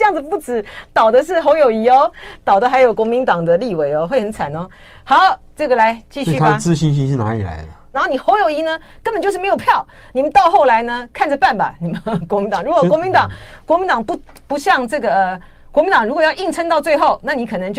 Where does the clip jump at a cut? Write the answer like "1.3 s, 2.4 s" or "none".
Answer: 7.9 s